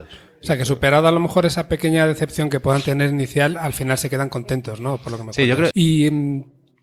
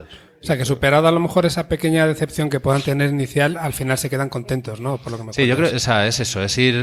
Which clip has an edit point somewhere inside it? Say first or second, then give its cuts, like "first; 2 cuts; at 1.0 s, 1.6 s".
first; 1 cut; at 5.7 s